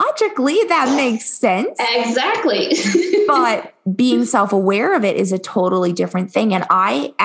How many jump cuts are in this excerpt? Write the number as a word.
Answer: zero